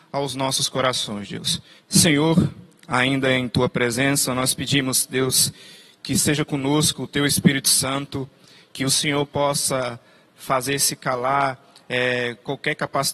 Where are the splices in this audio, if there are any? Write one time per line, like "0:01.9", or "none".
0:01.8